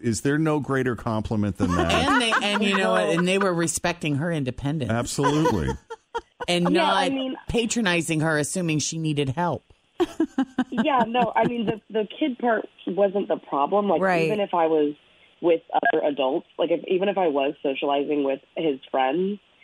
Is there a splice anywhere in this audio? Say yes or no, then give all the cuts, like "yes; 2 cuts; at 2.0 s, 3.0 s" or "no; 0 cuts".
no; 0 cuts